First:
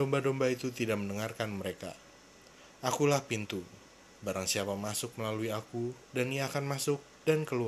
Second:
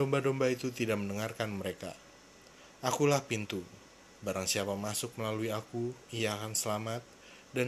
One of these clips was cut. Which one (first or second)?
first